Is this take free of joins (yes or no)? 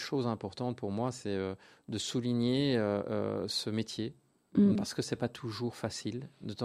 no